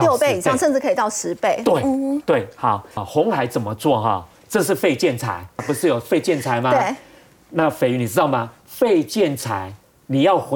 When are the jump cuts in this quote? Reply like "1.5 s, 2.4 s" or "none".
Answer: 3.0 s, 5.6 s